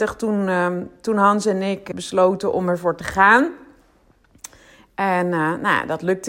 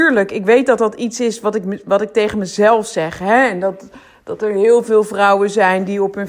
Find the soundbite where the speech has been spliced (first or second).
first